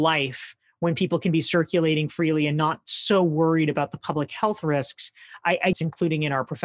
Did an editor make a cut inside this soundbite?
yes; 1 cut; at 5.7 s

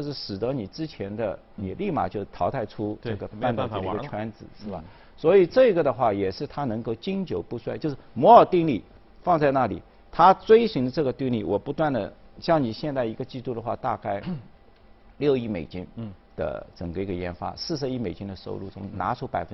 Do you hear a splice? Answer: yes; 2 cuts; at 1.6 s, 3.3 s

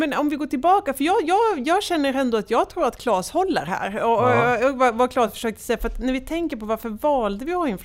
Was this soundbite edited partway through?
no; 0 cuts

